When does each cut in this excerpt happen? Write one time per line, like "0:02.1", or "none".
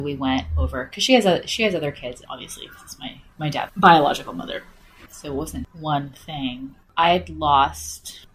0:02.3
0:05.1